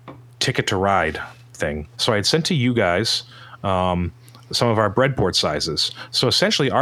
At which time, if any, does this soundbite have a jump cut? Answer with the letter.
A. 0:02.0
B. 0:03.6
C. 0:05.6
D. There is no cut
A